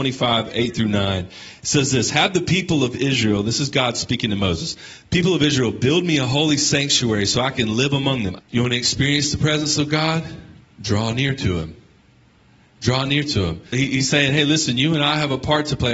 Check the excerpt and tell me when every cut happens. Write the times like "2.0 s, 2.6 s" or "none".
8.4 s, 13.7 s